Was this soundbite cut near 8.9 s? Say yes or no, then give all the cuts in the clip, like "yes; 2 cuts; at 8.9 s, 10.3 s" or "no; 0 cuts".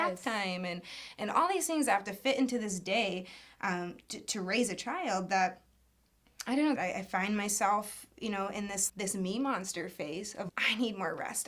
yes; 3 cuts; at 6.8 s, 8.9 s, 10.5 s